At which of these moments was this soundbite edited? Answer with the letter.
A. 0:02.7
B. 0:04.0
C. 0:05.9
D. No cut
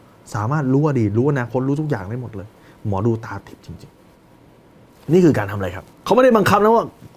C